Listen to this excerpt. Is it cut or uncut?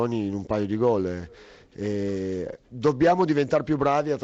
uncut